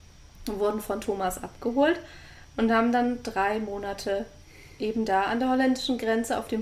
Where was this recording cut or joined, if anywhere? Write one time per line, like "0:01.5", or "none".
none